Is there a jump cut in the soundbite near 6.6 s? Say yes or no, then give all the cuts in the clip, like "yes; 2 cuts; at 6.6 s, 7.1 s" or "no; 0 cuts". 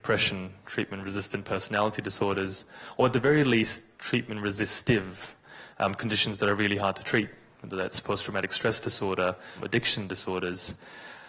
no; 0 cuts